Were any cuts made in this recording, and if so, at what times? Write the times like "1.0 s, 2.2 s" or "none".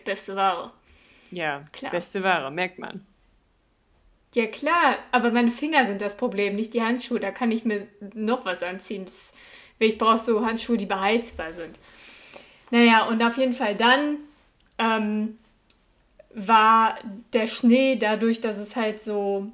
none